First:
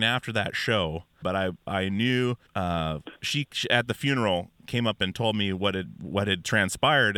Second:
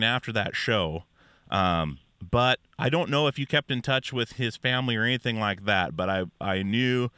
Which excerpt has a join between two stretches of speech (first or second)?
first